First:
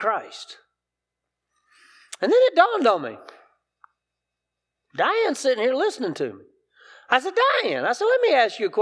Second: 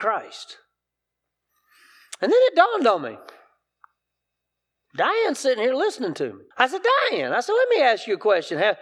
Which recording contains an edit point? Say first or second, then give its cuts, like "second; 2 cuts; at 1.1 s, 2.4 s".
second; 1 cut; at 6.5 s